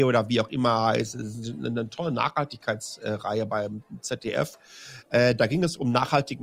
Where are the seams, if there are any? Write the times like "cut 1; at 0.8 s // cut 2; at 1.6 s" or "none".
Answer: none